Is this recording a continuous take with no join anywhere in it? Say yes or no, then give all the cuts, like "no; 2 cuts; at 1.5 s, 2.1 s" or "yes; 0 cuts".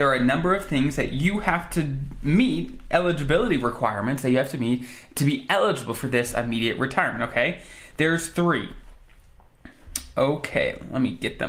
yes; 0 cuts